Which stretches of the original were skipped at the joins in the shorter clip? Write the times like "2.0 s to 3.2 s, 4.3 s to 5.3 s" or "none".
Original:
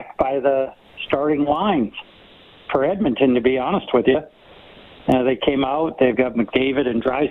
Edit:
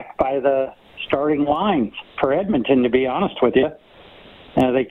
2.1 s to 2.6 s